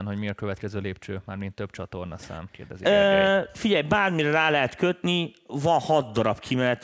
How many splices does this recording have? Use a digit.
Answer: 1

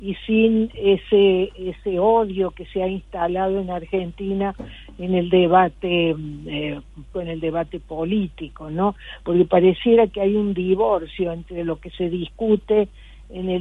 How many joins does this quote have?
1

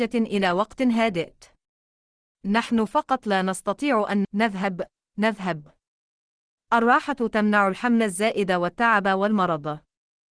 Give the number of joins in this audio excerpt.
2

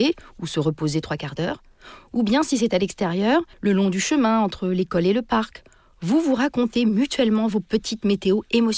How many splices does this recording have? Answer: 1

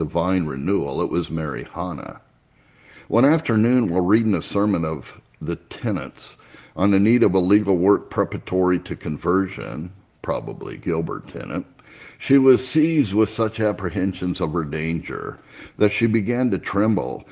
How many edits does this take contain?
0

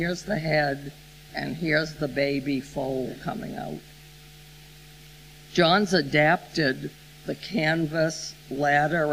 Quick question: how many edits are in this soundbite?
2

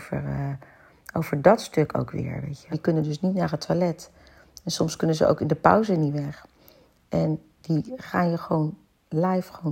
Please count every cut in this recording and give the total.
1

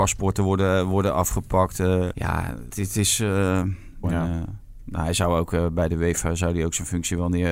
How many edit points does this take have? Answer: 2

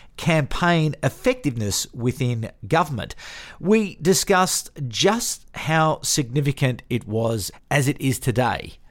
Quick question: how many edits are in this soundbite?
1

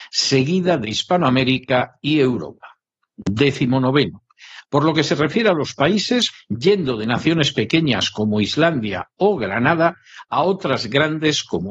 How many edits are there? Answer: 1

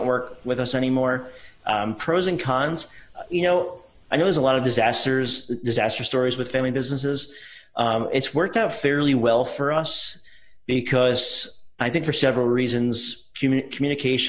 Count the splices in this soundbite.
1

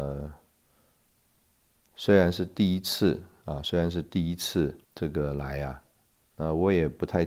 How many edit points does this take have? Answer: 1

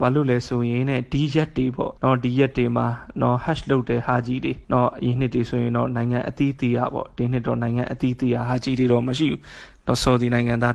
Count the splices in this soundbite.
2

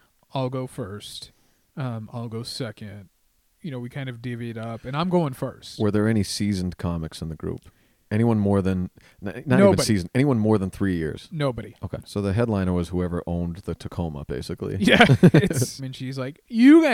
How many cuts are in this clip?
2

